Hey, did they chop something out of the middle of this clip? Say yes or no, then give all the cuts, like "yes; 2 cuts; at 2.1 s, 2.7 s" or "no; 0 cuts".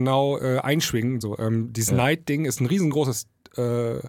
yes; 1 cut; at 1.2 s